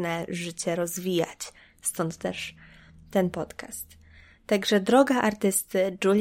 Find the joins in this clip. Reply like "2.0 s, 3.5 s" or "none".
none